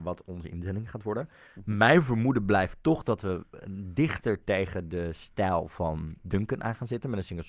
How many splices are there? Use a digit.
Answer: 0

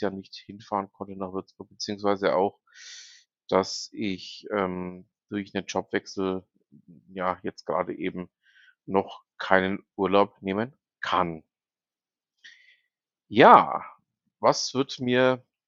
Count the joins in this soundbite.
0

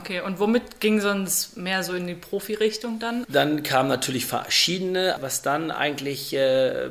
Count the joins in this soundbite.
2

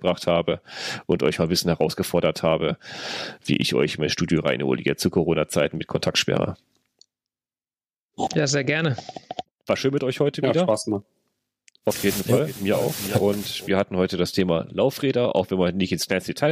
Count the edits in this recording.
0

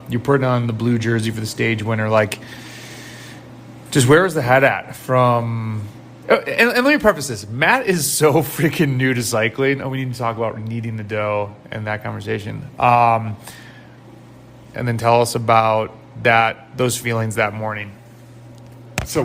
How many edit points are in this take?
1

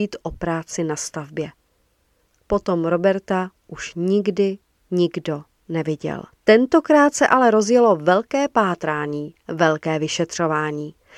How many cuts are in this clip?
1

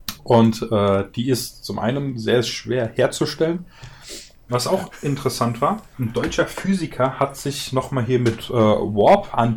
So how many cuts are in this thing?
2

